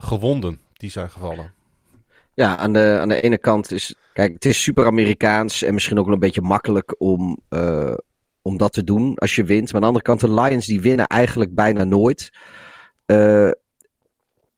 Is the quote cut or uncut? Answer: cut